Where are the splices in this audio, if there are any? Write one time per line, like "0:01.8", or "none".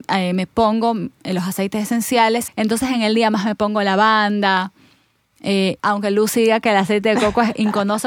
0:02.5
0:05.8